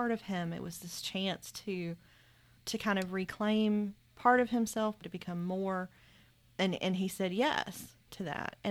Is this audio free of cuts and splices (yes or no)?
no